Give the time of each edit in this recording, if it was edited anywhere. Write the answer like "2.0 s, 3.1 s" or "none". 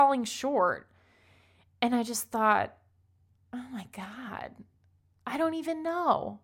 none